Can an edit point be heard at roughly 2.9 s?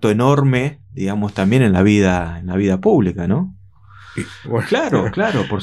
no; 1 cut; at 4.4 s

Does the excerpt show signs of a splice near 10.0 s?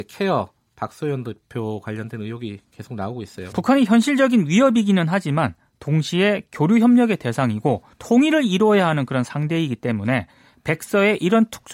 no; 2 cuts; at 3.5 s, 7.9 s

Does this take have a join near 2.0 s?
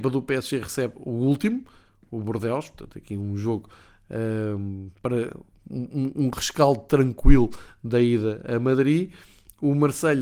no; 0 cuts

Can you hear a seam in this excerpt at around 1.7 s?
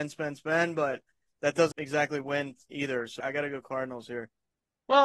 yes; 2 cuts; at 1.7 s, 3.2 s

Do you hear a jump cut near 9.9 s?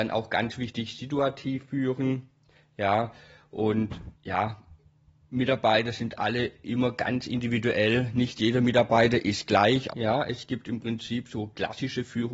yes; 2 cuts; at 4.1 s, 9.9 s

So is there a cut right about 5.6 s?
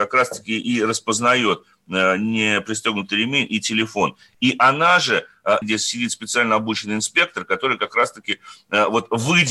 yes; 1 cut; at 5.6 s

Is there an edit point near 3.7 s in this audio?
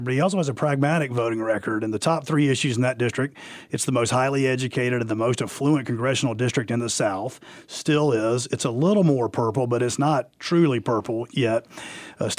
yes; 1 cut; at 3.7 s

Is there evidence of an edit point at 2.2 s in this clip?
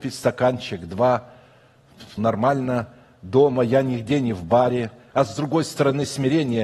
yes; 2 cuts; at 2.2 s, 5.1 s

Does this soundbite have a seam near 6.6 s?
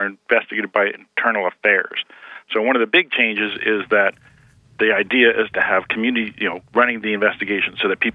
yes; 1 cut; at 6.6 s

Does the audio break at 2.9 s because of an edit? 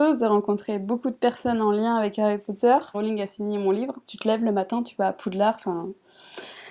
yes; 2 cuts; at 2.9 s, 4.0 s

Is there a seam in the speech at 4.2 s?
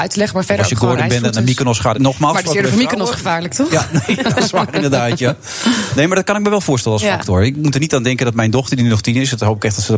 no; 1 cut; at 1.9 s

